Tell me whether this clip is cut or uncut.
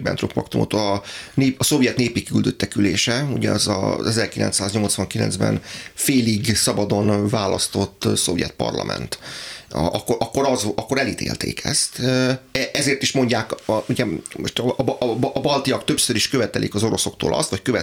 uncut